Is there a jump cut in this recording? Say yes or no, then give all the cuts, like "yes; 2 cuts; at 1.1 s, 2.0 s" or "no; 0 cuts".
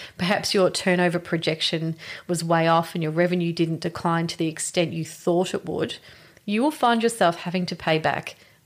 no; 0 cuts